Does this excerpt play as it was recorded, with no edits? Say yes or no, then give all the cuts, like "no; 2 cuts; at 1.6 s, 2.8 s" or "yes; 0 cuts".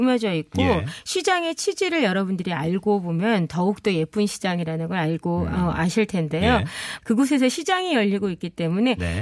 no; 1 cut; at 7.0 s